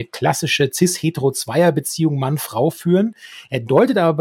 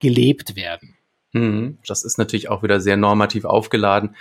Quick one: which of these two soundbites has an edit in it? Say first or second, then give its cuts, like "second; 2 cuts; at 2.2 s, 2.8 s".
second; 1 cut; at 1.8 s